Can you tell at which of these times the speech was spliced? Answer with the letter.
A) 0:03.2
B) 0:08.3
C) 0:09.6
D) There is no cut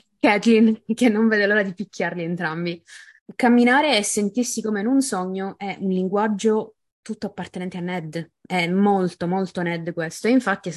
A